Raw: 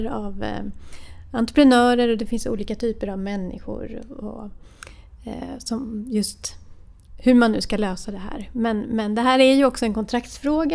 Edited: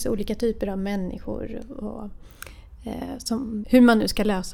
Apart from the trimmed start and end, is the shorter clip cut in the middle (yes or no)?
yes